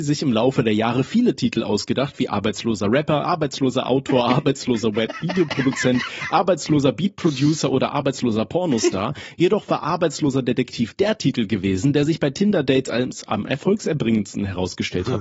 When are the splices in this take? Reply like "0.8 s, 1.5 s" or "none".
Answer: none